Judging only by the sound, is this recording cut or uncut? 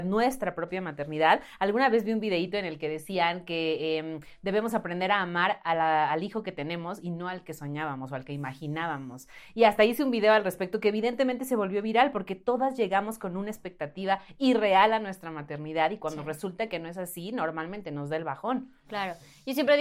uncut